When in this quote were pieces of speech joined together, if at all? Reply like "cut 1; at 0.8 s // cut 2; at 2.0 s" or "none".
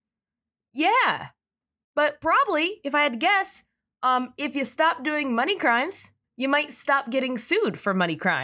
none